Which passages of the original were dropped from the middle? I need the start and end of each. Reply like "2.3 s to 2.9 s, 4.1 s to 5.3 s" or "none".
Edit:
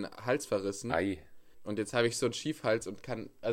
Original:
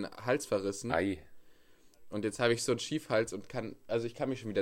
1.5 s to 2.0 s